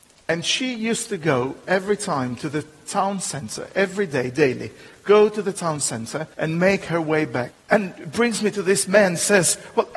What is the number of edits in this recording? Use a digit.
2